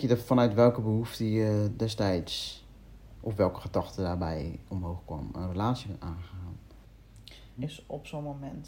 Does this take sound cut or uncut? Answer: cut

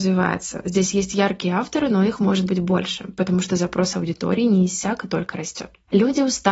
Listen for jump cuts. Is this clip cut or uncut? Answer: uncut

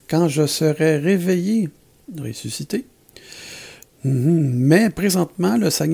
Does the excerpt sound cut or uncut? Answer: cut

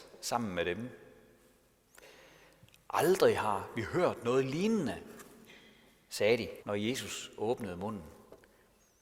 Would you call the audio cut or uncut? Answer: cut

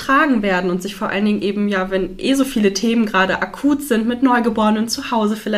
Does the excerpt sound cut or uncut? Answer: uncut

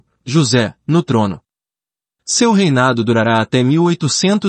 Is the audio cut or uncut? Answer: uncut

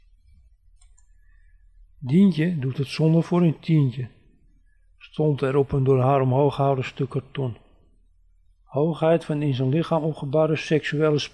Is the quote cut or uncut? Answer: cut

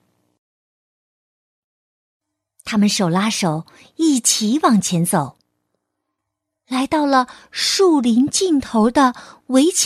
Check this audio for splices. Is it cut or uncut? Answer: uncut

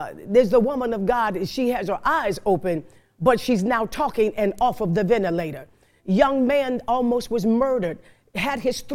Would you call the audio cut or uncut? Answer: uncut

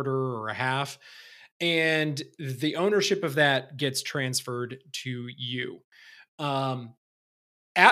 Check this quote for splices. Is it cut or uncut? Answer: uncut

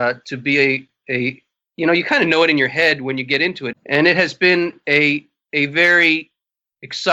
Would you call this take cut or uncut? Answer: cut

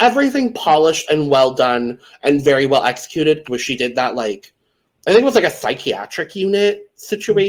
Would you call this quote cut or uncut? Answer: cut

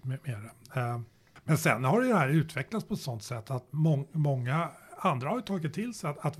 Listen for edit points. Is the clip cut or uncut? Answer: uncut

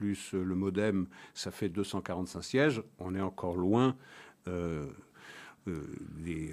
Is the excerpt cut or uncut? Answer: uncut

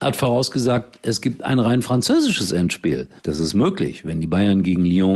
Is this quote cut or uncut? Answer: cut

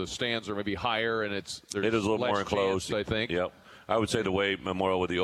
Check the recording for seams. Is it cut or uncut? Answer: cut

